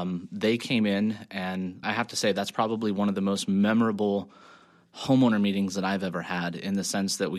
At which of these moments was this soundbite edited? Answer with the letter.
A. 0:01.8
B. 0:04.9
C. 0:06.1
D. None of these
A